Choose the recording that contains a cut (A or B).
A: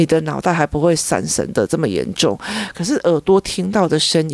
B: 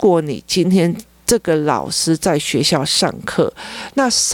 A